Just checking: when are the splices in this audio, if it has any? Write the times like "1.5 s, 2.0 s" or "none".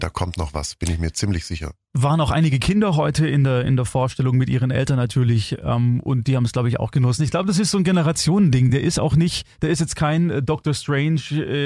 none